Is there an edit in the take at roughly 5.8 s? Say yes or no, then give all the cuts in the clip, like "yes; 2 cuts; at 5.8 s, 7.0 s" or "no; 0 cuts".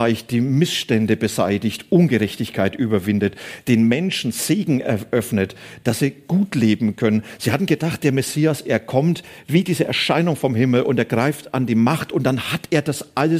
yes; 1 cut; at 5.8 s